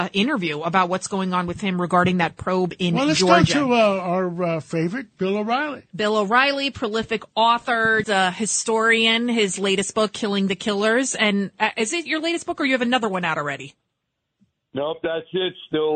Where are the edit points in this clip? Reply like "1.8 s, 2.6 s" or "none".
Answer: 8.0 s